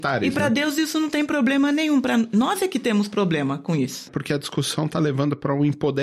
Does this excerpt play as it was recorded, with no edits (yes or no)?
no